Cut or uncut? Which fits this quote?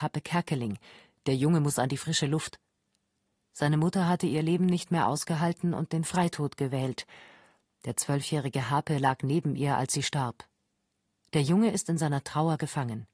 uncut